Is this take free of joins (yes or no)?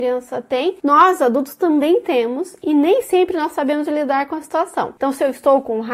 no